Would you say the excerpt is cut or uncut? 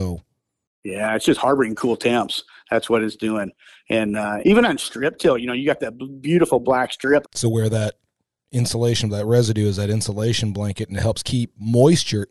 cut